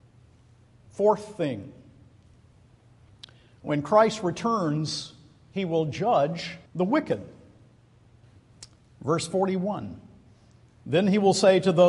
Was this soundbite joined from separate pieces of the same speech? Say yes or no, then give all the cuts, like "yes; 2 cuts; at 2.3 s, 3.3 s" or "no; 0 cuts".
yes; 1 cut; at 6.7 s